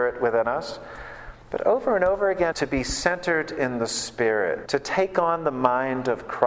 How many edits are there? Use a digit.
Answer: 3